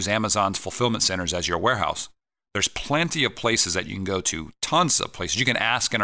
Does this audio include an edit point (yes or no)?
no